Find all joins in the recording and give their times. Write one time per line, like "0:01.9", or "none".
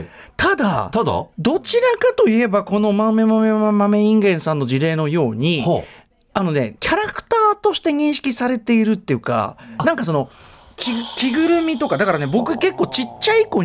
0:06.8